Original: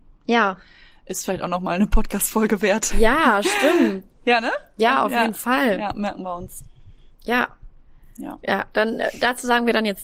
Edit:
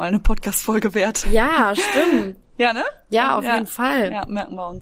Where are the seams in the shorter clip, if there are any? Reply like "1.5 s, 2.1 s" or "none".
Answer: none